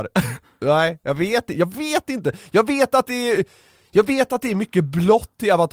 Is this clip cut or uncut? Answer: uncut